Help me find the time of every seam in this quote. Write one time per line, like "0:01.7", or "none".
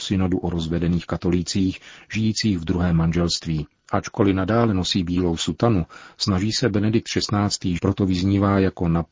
0:03.9
0:07.8